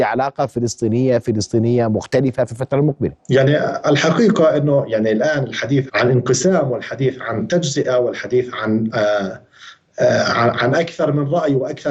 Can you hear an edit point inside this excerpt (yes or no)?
yes